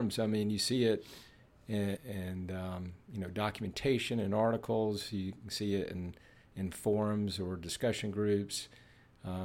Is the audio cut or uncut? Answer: cut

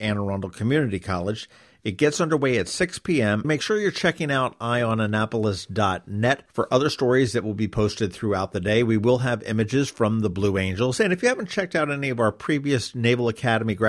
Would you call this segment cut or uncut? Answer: cut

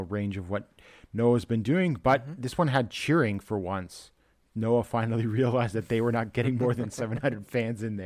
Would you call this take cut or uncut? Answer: uncut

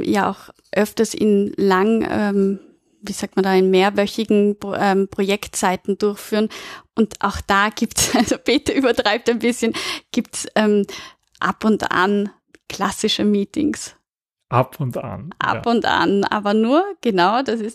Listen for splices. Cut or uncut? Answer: uncut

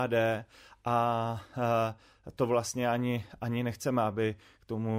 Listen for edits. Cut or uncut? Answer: uncut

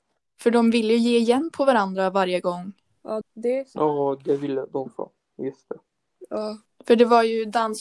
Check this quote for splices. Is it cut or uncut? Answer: cut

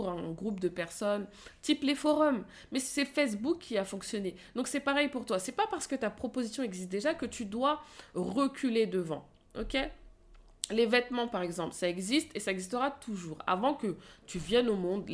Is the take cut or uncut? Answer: uncut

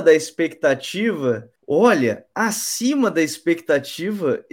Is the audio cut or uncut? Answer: cut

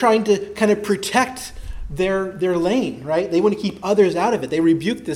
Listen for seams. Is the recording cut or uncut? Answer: uncut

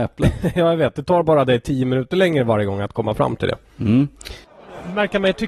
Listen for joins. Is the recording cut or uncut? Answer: uncut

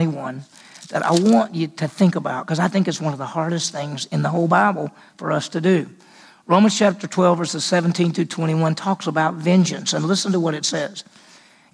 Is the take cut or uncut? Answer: uncut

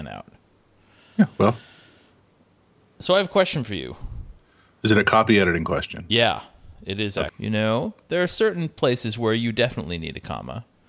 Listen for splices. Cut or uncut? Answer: cut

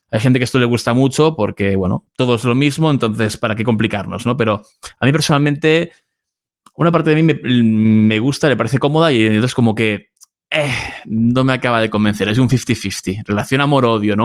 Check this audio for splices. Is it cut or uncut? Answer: uncut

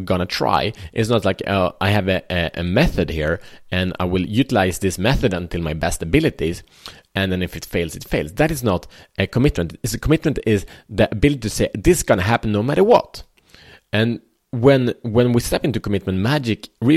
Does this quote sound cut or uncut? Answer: uncut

